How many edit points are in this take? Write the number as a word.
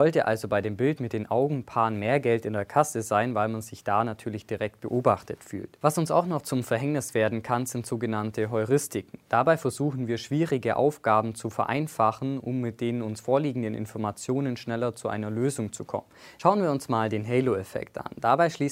one